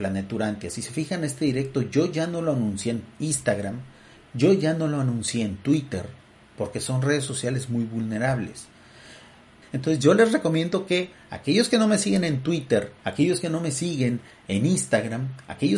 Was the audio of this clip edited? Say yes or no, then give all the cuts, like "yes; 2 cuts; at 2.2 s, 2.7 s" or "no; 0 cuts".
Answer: yes; 2 cuts; at 9.6 s, 13.0 s